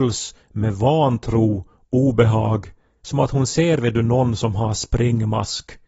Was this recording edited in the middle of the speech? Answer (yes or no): no